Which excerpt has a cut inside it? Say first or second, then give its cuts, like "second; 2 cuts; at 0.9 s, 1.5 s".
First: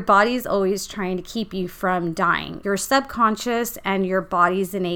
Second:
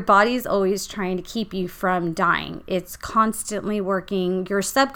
first; 1 cut; at 2.6 s